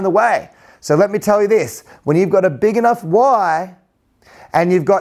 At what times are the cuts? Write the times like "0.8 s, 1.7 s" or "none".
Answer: none